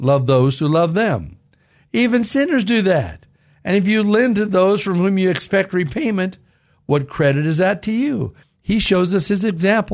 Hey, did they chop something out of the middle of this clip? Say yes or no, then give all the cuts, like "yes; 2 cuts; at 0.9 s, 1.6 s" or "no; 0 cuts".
yes; 2 cuts; at 1.8 s, 8.4 s